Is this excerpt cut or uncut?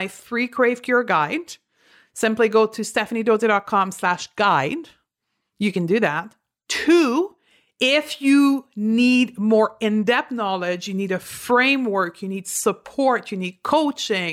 uncut